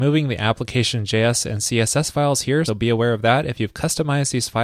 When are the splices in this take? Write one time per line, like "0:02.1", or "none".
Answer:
0:02.7